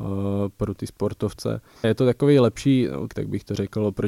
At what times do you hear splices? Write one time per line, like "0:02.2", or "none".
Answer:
0:01.8
0:03.1